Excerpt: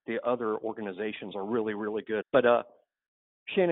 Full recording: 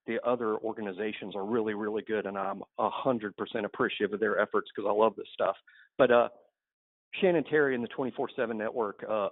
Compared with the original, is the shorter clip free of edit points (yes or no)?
no